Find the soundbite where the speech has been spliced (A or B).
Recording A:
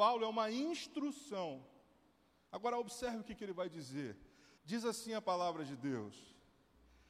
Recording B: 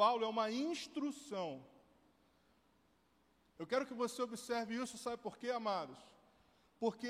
A